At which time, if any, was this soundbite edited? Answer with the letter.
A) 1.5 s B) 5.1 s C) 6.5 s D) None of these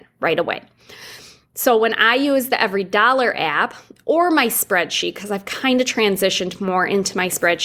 D